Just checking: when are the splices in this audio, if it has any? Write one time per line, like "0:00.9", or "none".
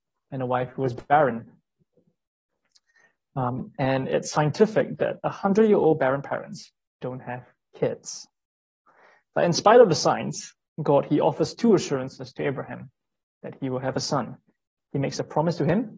none